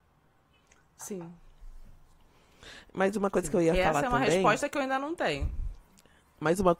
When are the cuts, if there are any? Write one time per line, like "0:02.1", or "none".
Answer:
none